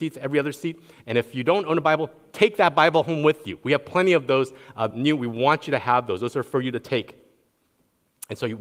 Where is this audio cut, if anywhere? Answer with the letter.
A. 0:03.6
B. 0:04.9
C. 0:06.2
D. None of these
B